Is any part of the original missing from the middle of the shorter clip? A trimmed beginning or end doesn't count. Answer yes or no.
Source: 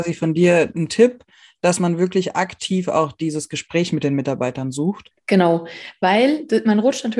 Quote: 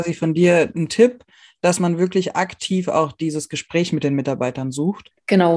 no